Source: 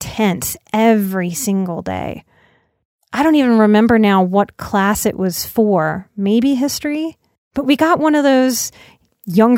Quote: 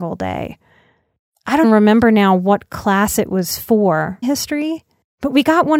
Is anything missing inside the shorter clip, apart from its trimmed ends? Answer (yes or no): yes